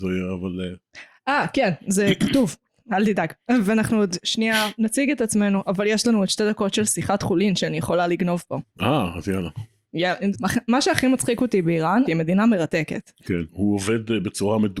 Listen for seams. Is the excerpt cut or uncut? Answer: cut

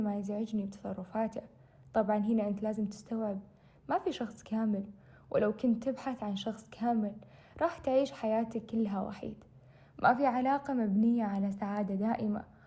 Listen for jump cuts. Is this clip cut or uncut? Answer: uncut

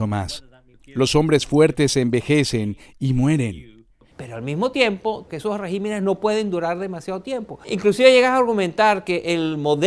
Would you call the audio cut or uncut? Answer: cut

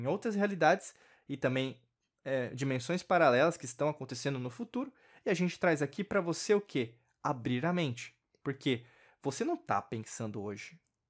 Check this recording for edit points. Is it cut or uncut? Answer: uncut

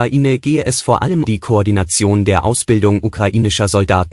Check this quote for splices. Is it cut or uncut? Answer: cut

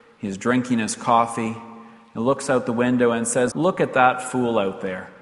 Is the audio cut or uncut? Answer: cut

